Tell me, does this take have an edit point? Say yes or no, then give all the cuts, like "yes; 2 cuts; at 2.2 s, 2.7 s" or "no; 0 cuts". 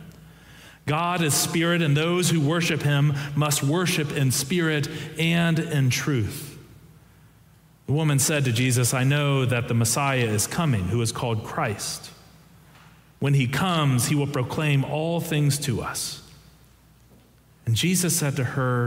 no; 0 cuts